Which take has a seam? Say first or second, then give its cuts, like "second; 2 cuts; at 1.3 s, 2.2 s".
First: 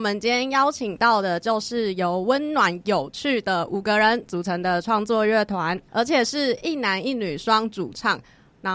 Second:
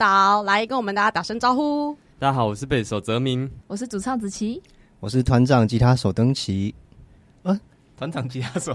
second; 2 cuts; at 2.1 s, 3.6 s